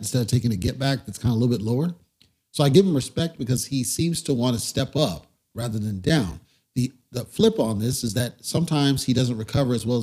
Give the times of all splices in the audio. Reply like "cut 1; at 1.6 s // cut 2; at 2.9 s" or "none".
none